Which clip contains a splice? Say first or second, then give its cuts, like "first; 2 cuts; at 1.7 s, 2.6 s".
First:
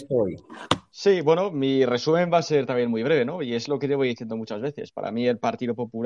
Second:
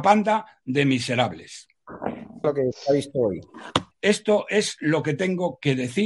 second; 2 cuts; at 2.4 s, 3.9 s